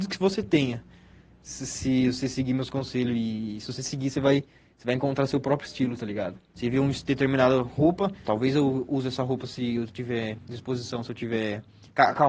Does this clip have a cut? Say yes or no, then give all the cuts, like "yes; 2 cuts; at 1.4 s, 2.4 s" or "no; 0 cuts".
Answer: yes; 2 cuts; at 6.5 s, 8.2 s